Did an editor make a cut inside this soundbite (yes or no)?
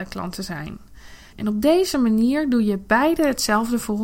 yes